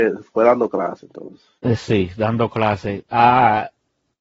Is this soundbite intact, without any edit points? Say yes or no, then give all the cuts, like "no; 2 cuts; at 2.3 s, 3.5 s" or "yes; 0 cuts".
yes; 0 cuts